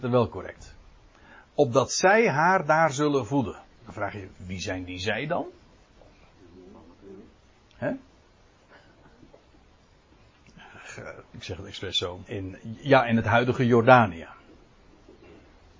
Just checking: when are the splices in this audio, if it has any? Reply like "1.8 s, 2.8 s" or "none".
4.3 s, 11.2 s, 12.3 s